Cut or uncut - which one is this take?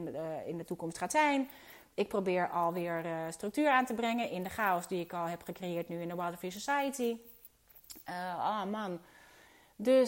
uncut